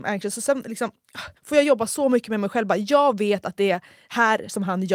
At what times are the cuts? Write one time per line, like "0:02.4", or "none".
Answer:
0:01.4

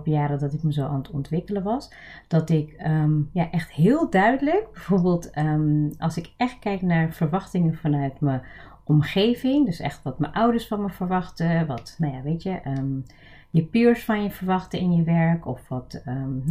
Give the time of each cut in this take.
none

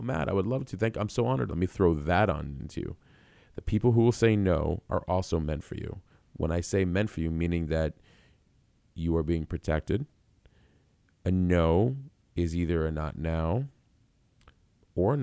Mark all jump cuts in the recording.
0:01.5

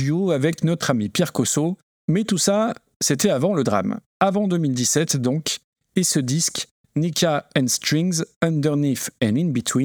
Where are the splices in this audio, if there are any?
0:01.9
0:04.1

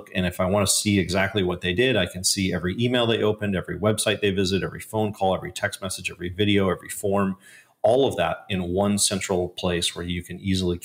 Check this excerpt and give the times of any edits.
none

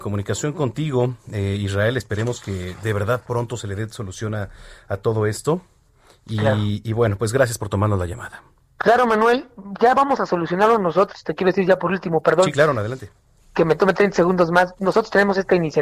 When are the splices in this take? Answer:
none

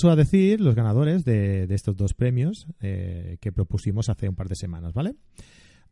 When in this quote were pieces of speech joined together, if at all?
none

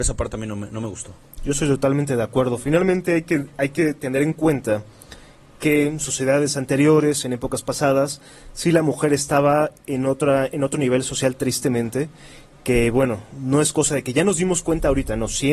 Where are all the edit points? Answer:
none

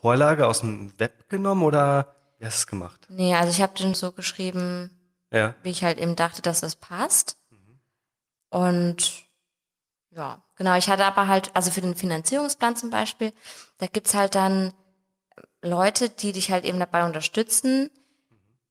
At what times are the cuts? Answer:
0:03.9

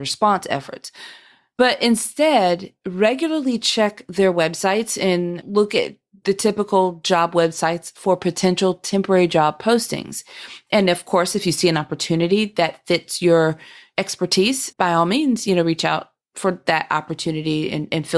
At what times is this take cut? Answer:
0:14.7

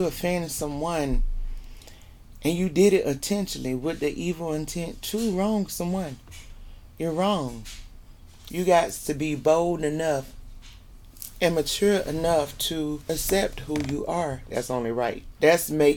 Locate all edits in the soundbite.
0:08.5
0:14.5

